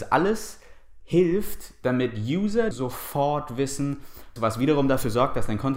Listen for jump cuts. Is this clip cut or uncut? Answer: cut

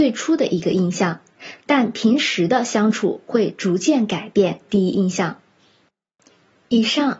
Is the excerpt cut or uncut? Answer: uncut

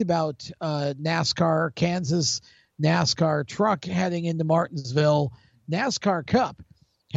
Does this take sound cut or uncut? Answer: uncut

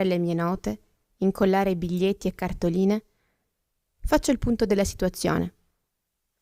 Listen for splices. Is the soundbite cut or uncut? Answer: uncut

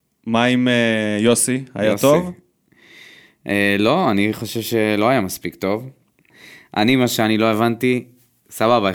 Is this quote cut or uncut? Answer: uncut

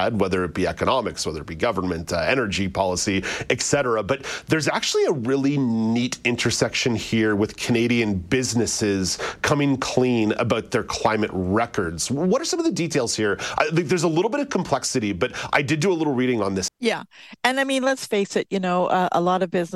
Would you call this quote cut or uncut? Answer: cut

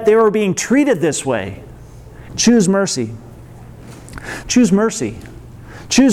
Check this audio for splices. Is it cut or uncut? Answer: cut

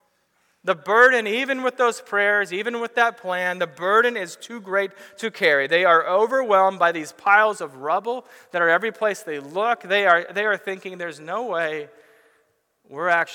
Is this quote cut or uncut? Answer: uncut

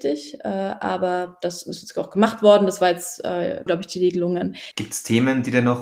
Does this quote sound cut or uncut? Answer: cut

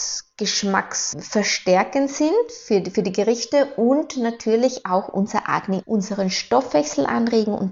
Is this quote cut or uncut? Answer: cut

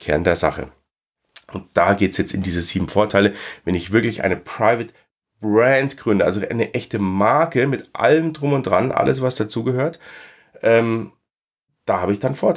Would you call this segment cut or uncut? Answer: uncut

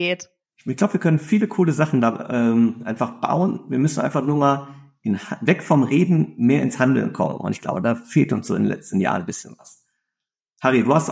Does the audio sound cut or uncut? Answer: uncut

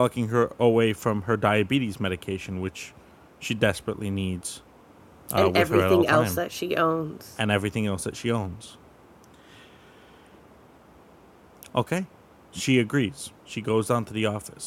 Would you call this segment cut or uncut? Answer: cut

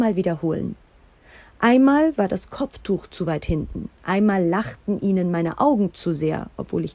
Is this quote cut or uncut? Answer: cut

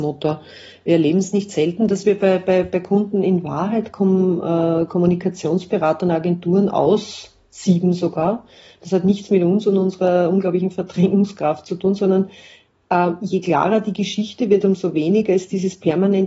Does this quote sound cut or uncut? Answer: uncut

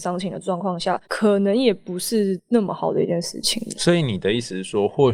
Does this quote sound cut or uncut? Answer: cut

